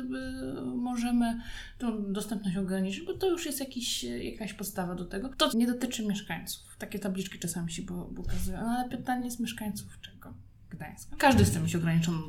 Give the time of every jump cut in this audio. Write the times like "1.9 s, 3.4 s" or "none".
5.5 s, 11.2 s